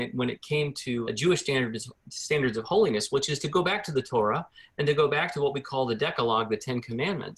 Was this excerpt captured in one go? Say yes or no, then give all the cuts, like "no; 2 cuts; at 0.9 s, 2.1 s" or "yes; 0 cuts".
no; 1 cut; at 1.0 s